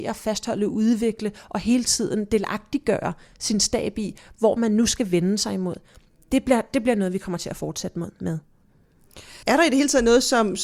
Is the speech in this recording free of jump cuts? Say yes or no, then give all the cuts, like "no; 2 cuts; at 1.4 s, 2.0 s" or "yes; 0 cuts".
no; 1 cut; at 9.4 s